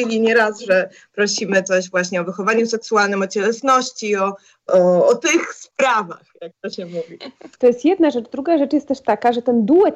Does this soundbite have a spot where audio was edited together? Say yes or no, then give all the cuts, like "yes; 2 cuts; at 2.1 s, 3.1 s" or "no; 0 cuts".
yes; 2 cuts; at 4.7 s, 7.5 s